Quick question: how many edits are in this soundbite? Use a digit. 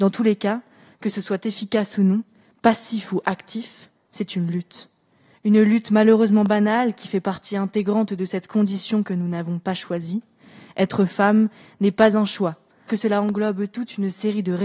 1